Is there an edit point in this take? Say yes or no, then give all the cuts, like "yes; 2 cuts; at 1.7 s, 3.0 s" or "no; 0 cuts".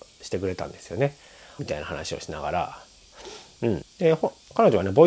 yes; 2 cuts; at 1.6 s, 3.8 s